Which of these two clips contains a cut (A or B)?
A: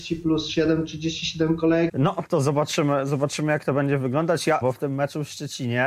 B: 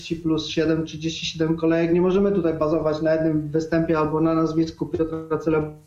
A